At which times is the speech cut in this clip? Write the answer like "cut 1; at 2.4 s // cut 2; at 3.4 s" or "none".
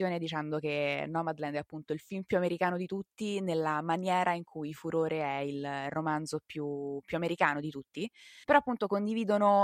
cut 1; at 8.4 s